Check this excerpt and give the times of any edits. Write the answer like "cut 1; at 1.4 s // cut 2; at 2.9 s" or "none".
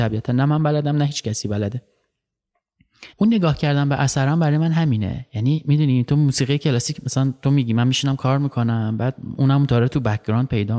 cut 1; at 3.1 s